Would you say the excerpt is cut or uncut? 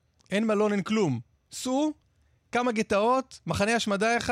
uncut